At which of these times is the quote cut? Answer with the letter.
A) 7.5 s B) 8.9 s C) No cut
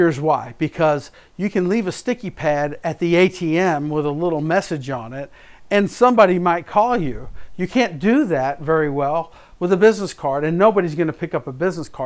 C